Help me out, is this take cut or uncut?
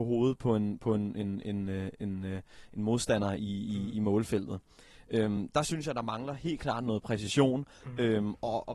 uncut